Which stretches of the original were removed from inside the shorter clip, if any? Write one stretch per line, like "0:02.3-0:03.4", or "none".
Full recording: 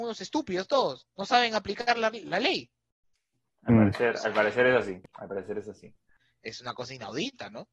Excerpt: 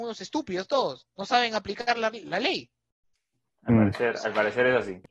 none